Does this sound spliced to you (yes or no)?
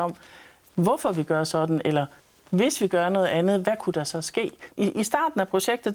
yes